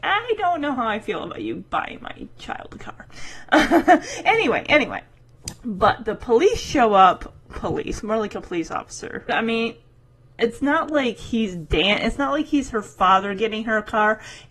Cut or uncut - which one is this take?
cut